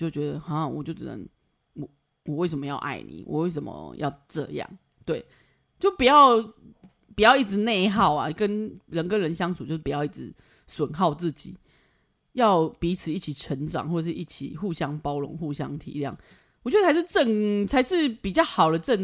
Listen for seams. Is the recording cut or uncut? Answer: uncut